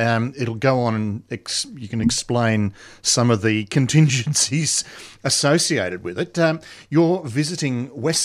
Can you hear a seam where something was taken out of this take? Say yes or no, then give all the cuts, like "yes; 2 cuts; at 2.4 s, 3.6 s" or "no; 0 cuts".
no; 0 cuts